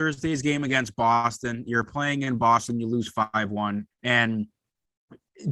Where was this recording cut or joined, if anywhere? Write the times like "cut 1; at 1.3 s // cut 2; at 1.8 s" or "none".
cut 1; at 3.9 s